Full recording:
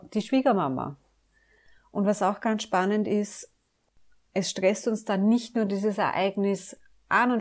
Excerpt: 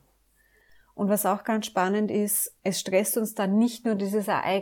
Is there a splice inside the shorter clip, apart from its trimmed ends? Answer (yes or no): yes